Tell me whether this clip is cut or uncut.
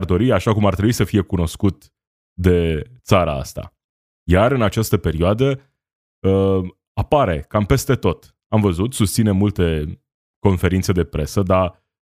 uncut